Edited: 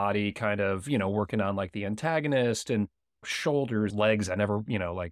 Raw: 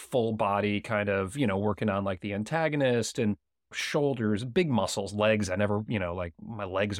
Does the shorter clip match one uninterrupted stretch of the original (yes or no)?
no